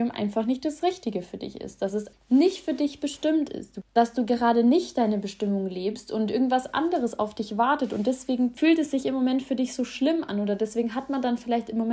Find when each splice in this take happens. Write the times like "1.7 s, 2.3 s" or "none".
2.1 s